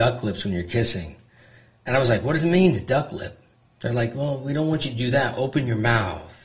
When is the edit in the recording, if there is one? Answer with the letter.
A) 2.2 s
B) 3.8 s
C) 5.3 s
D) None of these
D